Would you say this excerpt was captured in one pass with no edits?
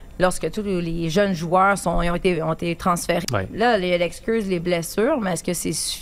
no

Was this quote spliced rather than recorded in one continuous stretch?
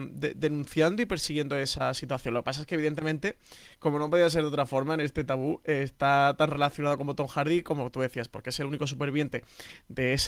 no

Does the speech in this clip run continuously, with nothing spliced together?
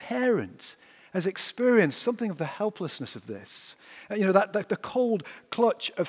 yes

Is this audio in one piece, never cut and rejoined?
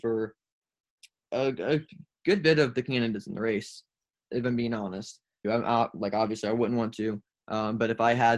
no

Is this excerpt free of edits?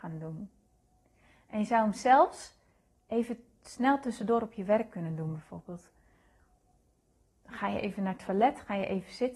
yes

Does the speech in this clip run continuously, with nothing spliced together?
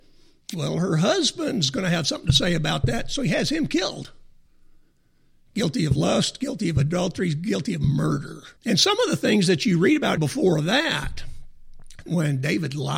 no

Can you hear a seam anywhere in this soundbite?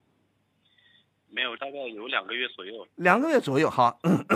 yes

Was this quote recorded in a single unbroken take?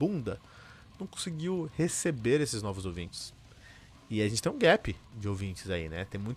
yes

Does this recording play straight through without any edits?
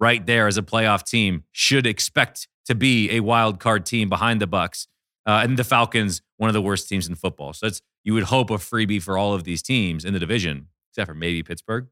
yes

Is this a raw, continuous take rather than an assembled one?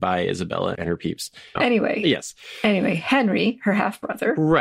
yes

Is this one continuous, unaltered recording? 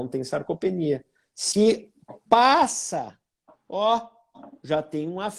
yes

